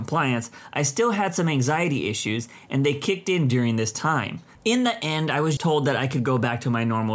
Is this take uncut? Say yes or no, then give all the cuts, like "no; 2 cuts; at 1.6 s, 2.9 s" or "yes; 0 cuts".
no; 2 cuts; at 4.6 s, 5.6 s